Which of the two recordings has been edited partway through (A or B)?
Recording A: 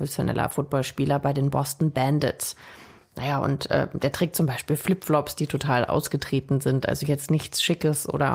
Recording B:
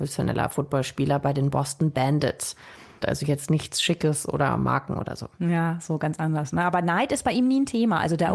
B